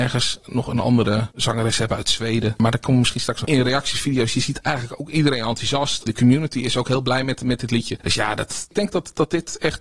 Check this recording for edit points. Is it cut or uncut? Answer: cut